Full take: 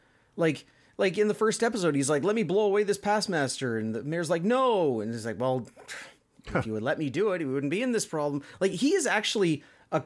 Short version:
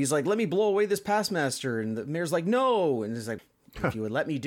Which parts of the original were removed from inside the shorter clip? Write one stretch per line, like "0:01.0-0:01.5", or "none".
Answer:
0:05.4-0:06.1